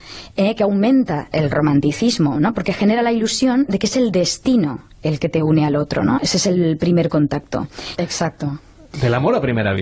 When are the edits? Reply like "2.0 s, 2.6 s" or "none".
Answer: 6.2 s, 8.0 s